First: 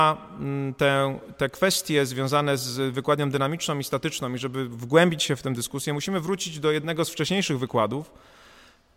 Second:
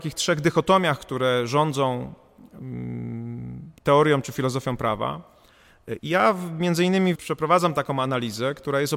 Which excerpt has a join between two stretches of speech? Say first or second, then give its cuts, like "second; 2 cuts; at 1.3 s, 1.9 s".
second; 2 cuts; at 6.0 s, 7.2 s